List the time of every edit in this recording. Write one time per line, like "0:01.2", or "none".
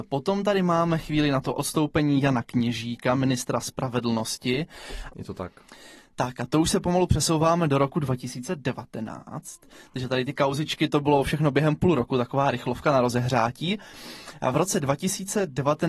0:05.1